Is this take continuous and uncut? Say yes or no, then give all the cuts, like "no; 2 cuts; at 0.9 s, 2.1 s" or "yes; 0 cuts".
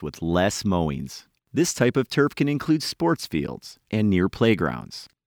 no; 2 cuts; at 1.4 s, 3.9 s